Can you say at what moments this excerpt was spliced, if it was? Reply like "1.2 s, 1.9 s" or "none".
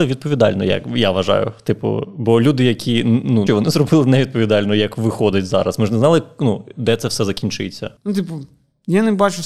3.5 s, 8.0 s